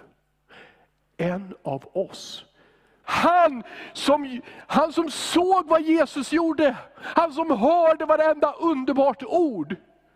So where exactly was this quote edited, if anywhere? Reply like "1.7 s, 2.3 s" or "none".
3.0 s